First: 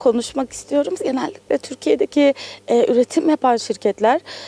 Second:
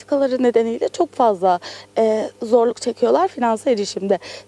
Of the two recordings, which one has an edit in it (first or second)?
first